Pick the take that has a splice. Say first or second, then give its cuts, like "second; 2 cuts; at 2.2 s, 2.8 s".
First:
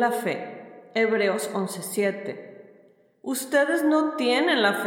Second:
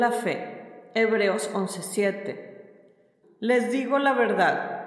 second; 1 cut; at 3.2 s